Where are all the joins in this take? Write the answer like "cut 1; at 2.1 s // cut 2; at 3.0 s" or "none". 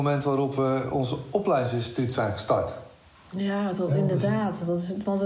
none